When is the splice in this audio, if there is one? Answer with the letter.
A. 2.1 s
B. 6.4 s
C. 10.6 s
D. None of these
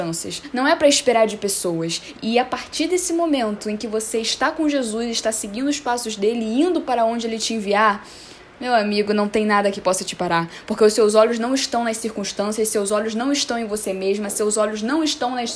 A